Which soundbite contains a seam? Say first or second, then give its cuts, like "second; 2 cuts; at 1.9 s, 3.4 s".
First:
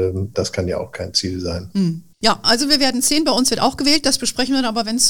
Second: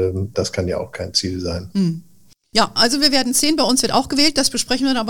first; 1 cut; at 2.1 s